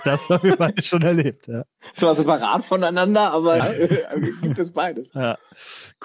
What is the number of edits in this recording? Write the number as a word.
two